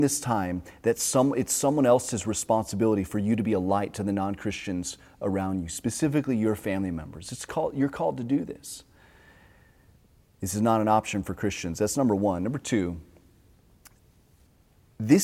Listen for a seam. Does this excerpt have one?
no; 0 cuts

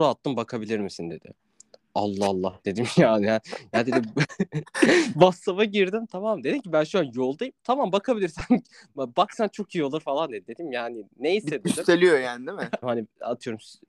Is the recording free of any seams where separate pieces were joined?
no; 1 cut; at 12.8 s

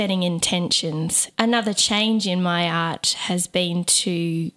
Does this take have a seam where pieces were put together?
no; 0 cuts

